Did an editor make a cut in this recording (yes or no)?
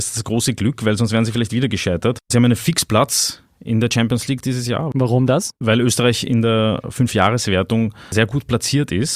no